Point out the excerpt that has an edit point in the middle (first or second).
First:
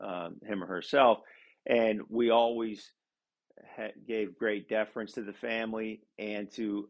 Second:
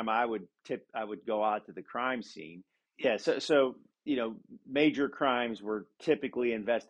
second